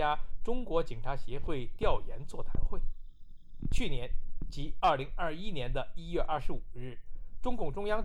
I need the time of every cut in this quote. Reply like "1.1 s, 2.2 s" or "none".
none

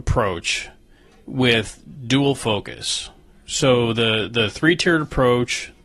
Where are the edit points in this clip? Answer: none

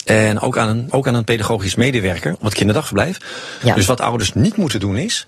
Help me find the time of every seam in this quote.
0.9 s, 3.6 s

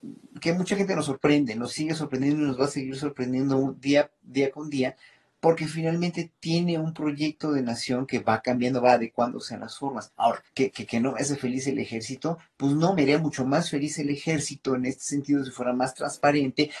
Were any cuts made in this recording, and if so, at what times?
10.5 s

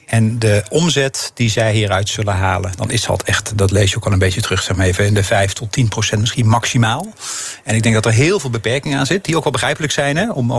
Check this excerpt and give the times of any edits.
none

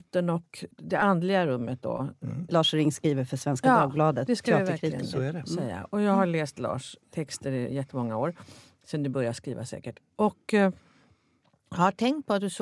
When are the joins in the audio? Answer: 2.5 s

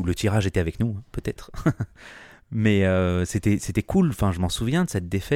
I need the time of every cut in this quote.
none

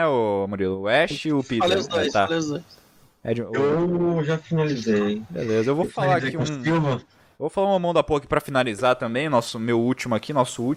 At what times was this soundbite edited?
none

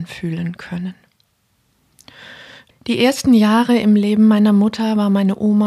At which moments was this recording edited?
2.7 s

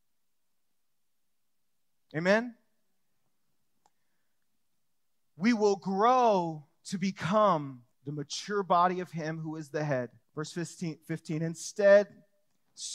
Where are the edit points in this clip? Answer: 7.9 s, 10.2 s

